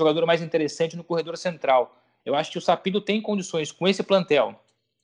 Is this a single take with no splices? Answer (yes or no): no